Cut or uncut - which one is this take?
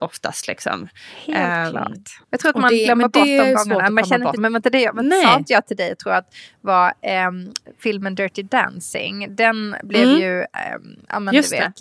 cut